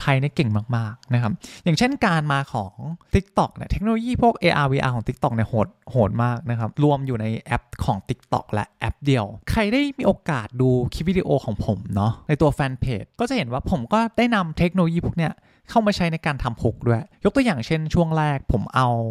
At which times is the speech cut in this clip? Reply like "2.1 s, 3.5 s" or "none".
6.7 s, 17.1 s